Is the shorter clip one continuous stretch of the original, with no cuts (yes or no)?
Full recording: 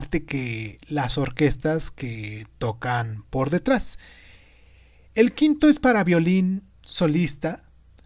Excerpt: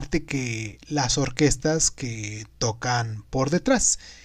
yes